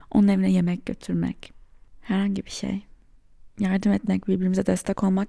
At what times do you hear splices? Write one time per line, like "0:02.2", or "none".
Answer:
none

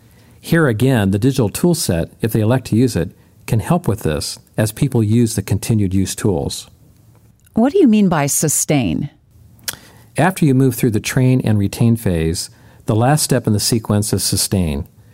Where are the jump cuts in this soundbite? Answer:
none

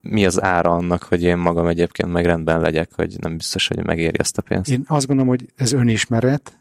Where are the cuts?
0:05.5

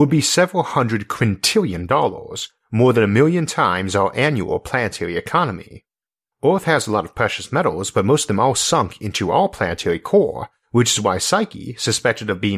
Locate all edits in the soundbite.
0:06.3

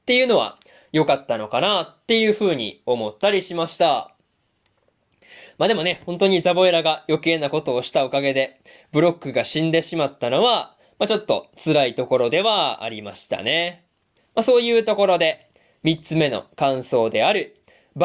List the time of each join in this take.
0:14.2

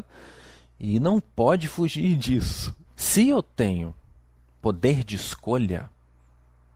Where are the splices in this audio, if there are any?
0:02.9

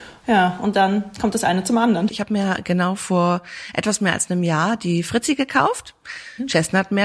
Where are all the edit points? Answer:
0:02.1

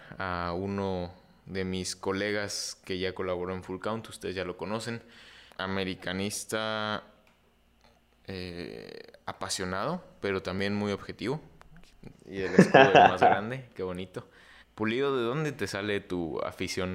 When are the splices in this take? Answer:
0:05.5
0:12.1
0:14.6

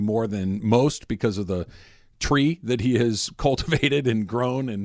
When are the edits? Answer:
none

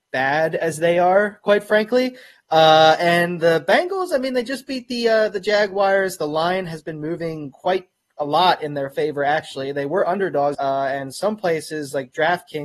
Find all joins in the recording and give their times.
0:10.5

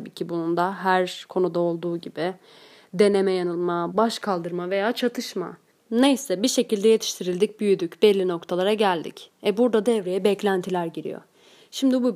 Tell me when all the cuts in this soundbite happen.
0:03.9
0:05.7

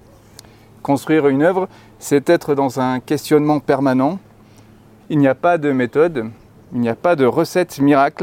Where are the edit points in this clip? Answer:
0:05.0

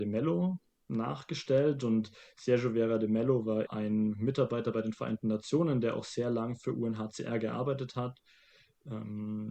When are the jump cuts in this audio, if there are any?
0:03.7

